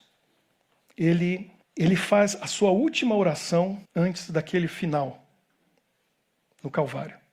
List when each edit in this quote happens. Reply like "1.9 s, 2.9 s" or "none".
1.6 s, 3.8 s